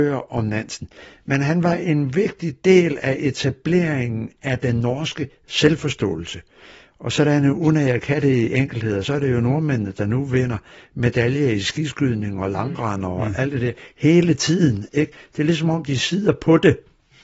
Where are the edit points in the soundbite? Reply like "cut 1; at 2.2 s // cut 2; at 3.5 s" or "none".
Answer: none